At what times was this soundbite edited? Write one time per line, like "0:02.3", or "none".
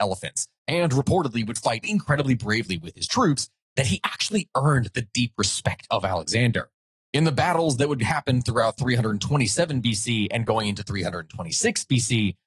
0:01.8
0:07.0